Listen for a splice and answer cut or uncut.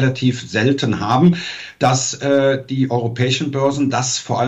uncut